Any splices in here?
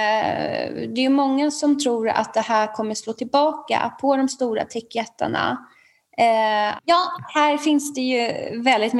yes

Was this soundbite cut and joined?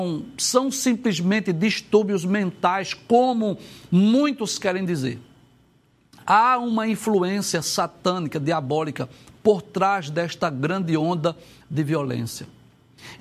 no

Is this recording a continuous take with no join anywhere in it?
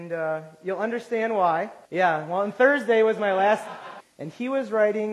no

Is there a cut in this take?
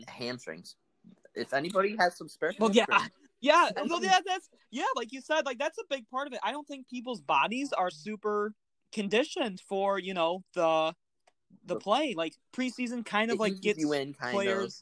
no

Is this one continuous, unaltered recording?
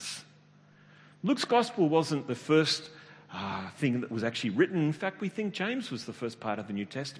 yes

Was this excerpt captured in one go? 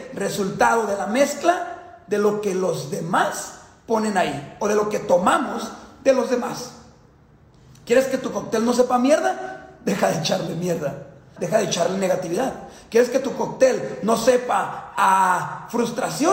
no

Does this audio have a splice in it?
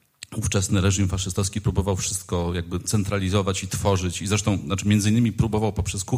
no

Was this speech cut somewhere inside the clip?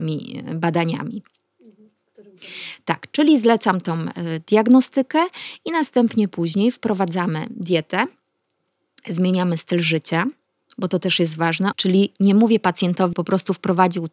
yes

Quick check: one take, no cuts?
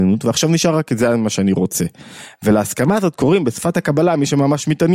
yes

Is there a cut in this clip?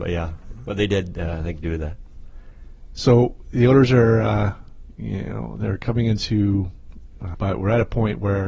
yes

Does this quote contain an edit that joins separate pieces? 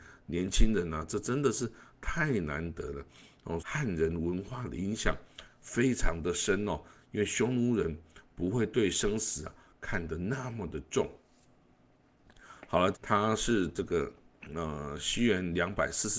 yes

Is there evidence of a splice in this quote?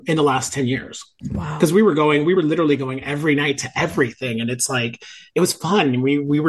no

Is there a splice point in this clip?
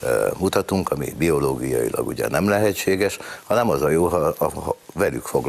no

